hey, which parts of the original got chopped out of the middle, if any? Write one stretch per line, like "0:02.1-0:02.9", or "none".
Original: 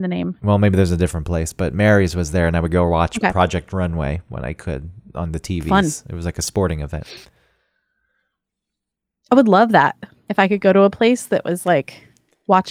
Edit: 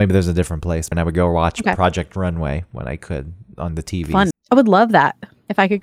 0:01.6-0:02.5
0:05.9-0:09.1